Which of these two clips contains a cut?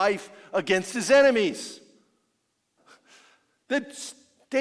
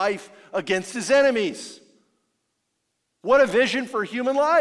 first; 1 cut; at 2.8 s

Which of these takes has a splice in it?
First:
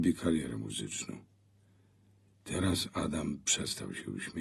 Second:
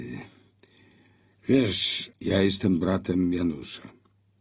second; 1 cut; at 2.1 s

